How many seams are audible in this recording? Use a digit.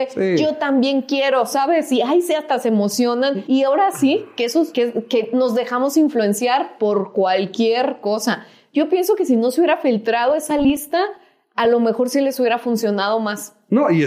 0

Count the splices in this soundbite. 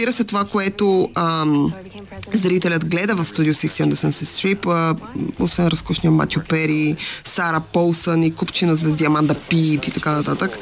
0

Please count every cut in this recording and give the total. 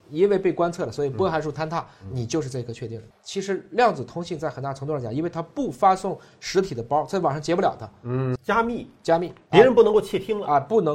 2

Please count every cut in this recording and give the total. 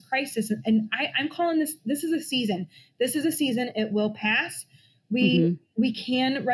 0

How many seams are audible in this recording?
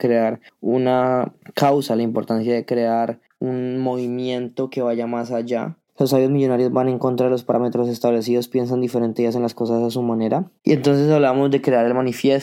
2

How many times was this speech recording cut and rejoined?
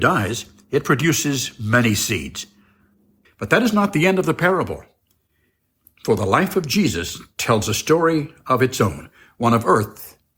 1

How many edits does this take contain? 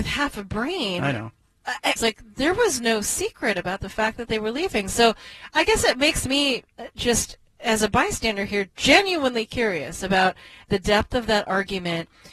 1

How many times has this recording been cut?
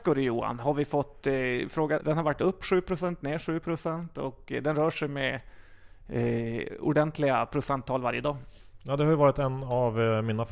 1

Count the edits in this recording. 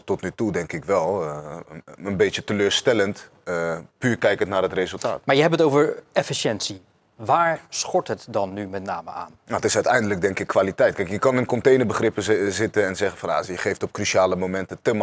0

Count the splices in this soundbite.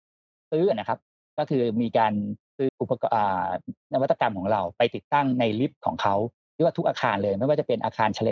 1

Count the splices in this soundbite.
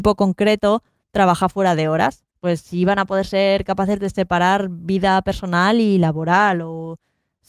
1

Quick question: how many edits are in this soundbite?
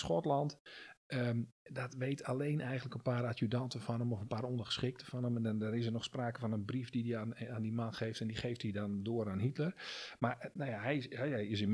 0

